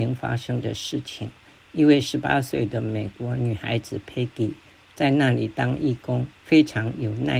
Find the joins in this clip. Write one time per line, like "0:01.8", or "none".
0:06.4